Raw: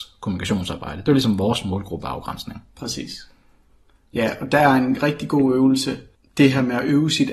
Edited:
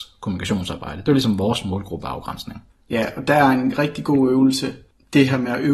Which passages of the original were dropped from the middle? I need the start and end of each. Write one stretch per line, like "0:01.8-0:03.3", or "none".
0:02.7-0:03.9